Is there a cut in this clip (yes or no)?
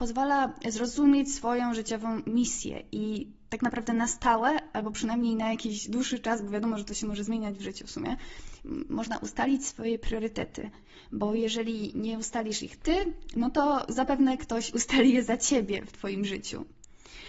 no